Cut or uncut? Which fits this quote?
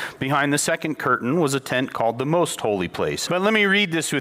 cut